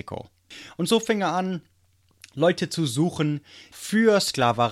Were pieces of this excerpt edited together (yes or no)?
yes